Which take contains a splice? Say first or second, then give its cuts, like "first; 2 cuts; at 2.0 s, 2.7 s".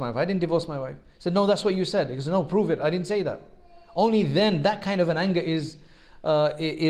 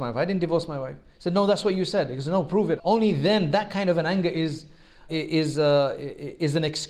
second; 2 cuts; at 2.8 s, 5.1 s